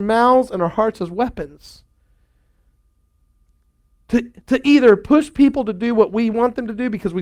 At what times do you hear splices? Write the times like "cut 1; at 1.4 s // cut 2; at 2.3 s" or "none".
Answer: none